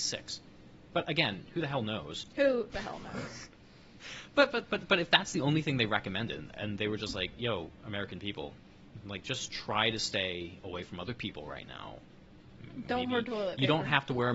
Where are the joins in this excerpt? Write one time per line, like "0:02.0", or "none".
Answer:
none